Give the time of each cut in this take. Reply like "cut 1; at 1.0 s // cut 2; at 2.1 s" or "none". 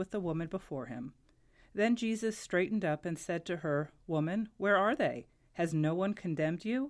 none

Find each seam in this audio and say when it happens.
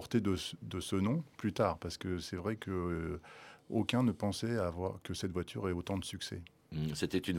none

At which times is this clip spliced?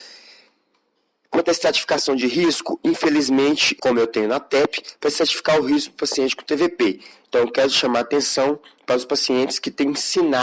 cut 1; at 3.8 s

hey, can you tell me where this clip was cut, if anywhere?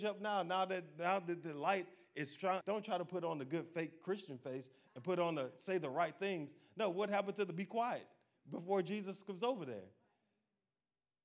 cut 1; at 2.6 s

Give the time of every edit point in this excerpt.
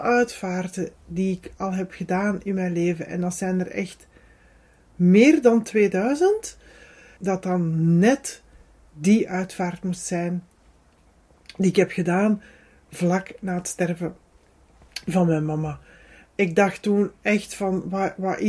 cut 1; at 7.2 s

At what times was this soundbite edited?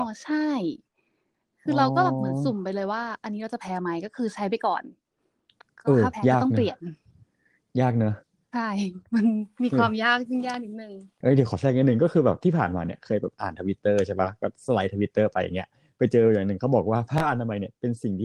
cut 1; at 11.2 s

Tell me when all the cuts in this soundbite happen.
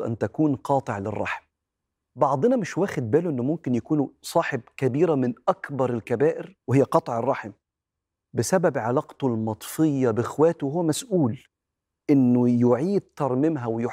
cut 1; at 6.6 s

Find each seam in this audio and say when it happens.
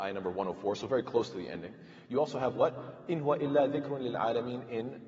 none

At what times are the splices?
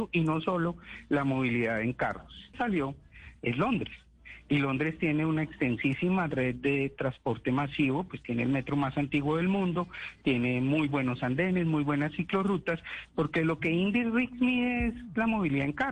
cut 1; at 2.5 s

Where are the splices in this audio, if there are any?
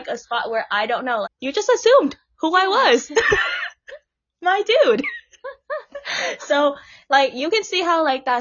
cut 1; at 1.2 s

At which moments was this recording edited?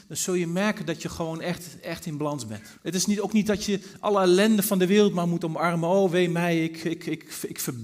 cut 1; at 2.8 s

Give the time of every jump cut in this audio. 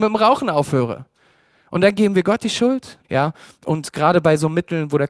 cut 1; at 3.0 s

